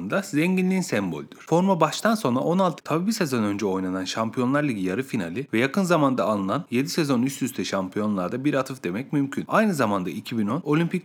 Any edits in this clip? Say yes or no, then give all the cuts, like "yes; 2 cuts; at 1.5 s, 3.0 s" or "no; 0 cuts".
yes; 1 cut; at 2.8 s